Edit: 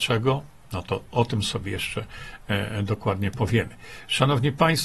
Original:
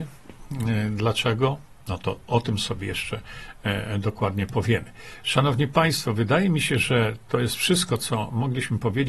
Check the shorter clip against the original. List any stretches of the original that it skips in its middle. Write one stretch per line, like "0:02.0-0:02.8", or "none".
none